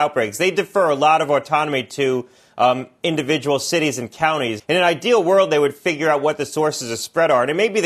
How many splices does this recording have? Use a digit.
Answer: 1